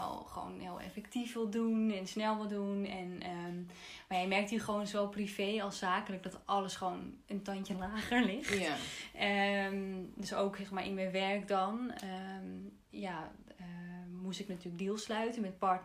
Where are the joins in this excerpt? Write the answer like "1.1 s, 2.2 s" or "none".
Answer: none